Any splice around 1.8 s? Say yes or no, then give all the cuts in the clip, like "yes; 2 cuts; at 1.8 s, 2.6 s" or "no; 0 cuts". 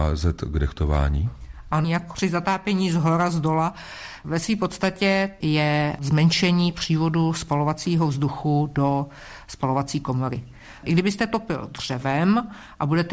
yes; 2 cuts; at 1.8 s, 5.4 s